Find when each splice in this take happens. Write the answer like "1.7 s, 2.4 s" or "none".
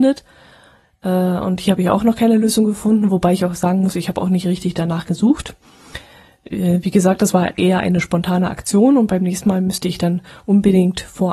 none